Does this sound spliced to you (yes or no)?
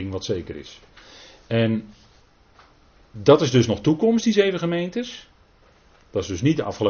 no